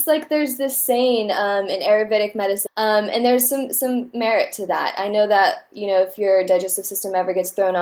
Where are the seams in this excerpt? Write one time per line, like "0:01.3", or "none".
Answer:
0:02.7